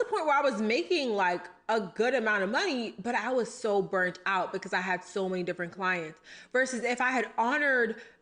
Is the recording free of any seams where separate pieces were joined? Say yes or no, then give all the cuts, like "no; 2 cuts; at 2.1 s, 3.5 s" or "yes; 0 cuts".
yes; 0 cuts